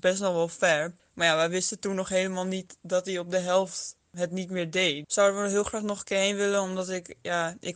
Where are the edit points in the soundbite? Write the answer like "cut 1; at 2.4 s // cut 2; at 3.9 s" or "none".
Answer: cut 1; at 5.0 s